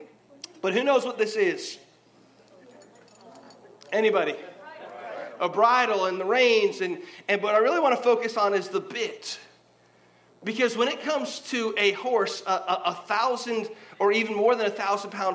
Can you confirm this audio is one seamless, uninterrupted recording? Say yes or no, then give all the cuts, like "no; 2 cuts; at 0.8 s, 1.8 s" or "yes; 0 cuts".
yes; 0 cuts